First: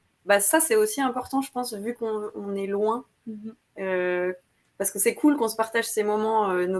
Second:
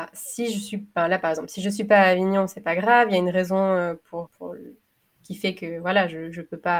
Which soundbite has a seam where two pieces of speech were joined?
second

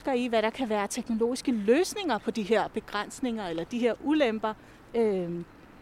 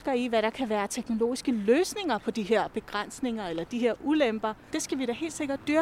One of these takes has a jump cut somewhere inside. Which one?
second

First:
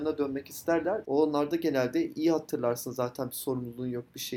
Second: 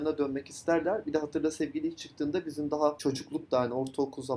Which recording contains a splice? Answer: first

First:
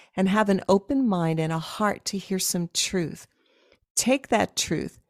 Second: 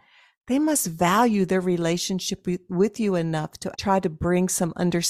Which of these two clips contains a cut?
second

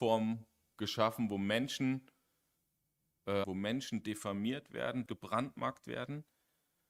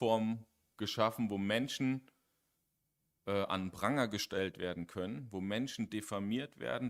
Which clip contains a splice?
first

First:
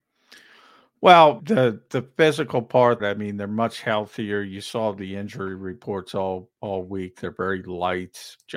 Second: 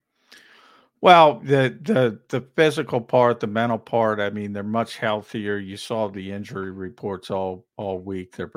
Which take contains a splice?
first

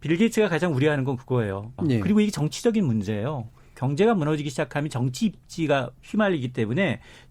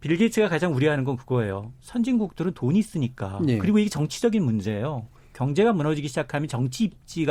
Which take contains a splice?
first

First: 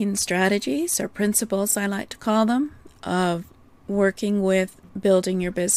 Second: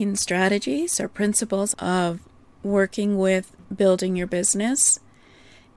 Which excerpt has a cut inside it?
second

